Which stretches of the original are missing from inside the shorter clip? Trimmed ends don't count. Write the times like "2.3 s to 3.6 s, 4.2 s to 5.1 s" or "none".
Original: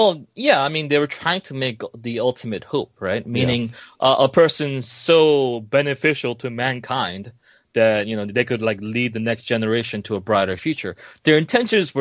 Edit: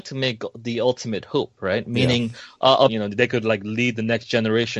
4.3 s to 8.0 s